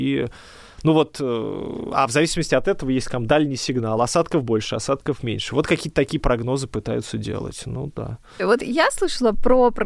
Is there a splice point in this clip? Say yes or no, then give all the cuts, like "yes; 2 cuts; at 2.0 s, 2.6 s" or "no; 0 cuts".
no; 0 cuts